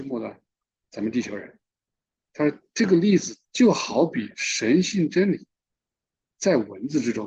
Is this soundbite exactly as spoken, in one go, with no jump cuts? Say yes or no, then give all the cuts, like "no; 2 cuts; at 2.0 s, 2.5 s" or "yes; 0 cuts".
no; 1 cut; at 2.3 s